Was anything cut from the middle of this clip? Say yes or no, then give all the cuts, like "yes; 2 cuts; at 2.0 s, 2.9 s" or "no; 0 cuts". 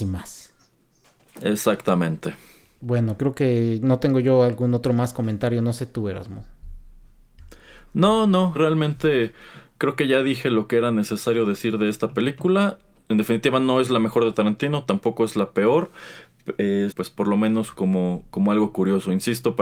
yes; 3 cuts; at 3.2 s, 8.5 s, 16.9 s